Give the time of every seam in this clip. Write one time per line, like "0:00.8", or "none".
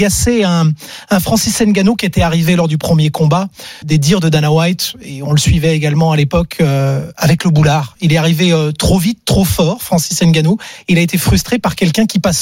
0:03.8